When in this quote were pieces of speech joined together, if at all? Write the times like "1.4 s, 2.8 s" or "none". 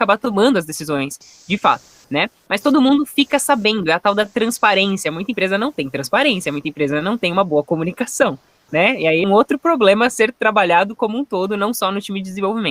9.2 s